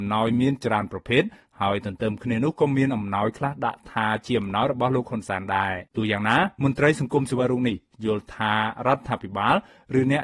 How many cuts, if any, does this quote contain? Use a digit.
1